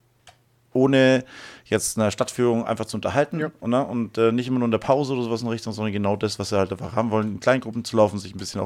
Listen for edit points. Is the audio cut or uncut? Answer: uncut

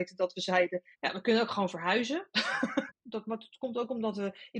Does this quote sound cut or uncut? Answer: cut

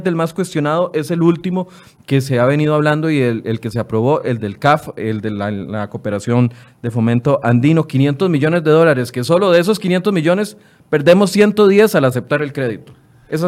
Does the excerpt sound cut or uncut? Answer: uncut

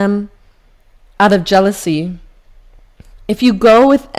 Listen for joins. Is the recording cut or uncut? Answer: uncut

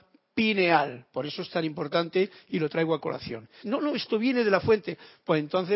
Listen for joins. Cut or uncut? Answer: cut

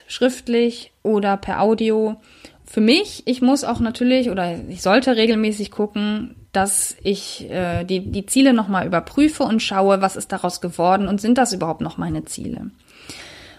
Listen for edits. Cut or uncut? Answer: cut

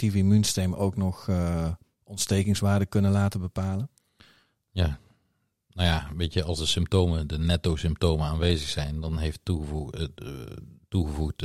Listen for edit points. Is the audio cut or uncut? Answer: uncut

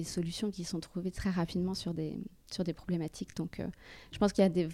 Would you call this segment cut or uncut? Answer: uncut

